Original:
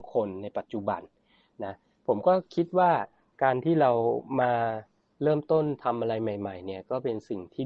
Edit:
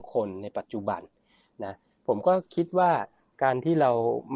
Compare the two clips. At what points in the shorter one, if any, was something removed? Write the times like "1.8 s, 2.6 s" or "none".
none